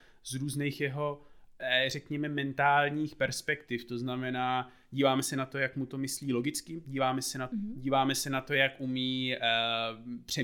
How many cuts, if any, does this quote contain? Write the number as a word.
one